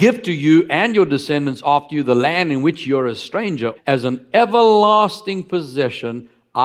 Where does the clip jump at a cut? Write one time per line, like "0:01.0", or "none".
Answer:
0:03.8

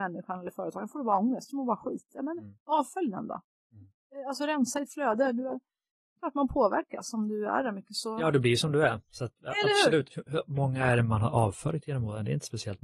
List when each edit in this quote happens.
none

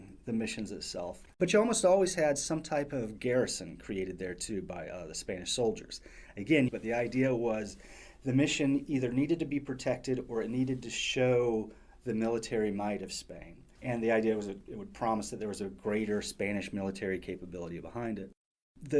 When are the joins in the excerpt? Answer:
0:01.3
0:06.7

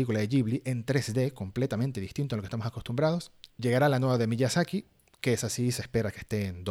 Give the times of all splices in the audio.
0:03.5

